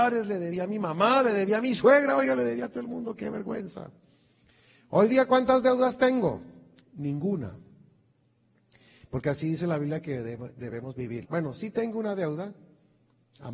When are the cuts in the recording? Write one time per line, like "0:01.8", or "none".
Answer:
0:11.2